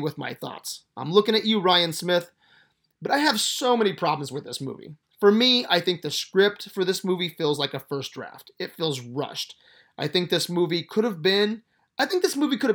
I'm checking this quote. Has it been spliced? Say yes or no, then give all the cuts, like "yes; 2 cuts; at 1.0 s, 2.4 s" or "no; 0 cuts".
no; 0 cuts